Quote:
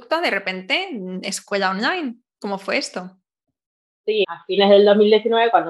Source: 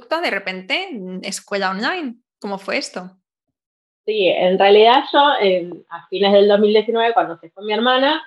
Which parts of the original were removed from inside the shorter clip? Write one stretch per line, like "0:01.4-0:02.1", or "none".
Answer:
0:04.2-0:05.9